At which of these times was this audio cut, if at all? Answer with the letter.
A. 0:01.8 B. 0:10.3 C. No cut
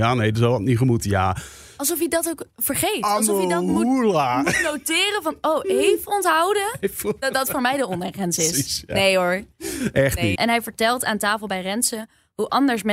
B